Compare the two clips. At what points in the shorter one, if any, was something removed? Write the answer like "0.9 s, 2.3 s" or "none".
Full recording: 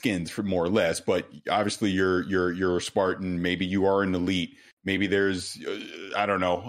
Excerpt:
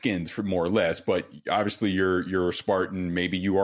2.2 s